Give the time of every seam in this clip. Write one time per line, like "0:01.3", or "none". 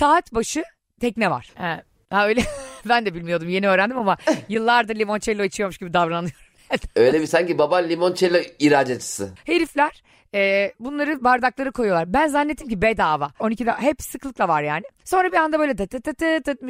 0:01.5
0:13.4